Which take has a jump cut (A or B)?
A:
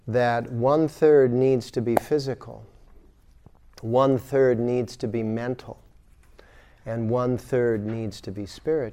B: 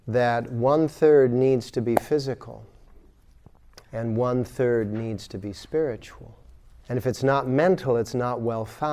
B